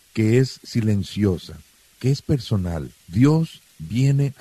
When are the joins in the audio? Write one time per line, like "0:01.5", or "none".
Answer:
0:03.0